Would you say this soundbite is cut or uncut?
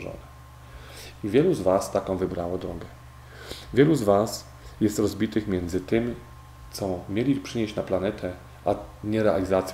cut